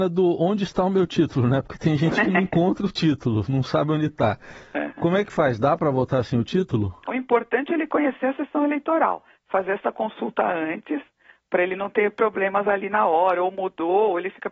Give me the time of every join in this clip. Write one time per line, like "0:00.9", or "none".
0:07.1